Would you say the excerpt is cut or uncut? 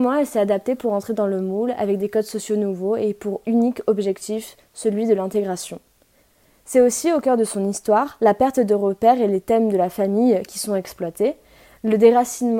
uncut